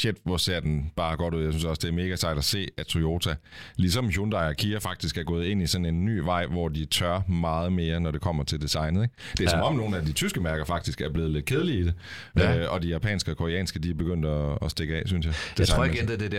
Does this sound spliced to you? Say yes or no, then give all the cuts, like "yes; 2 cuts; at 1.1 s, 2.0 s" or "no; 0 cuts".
no; 0 cuts